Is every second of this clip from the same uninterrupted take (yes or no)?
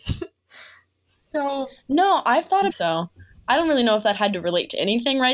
no